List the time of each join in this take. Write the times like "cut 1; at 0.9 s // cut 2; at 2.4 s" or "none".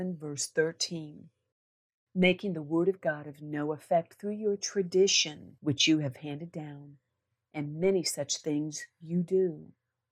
none